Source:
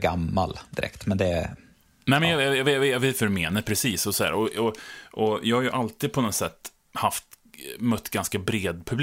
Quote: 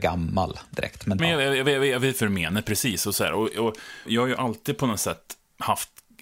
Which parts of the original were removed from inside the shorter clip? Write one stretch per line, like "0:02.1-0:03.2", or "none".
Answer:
0:01.2-0:02.2
0:05.1-0:05.4